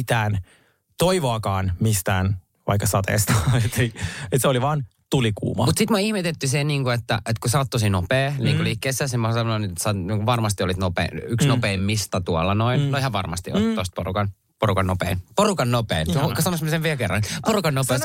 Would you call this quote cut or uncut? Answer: uncut